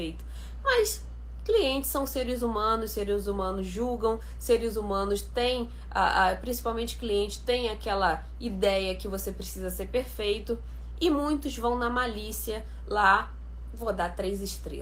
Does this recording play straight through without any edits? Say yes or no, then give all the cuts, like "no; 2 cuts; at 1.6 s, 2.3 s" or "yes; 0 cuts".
yes; 0 cuts